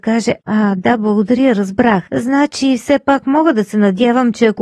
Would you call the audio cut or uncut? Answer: cut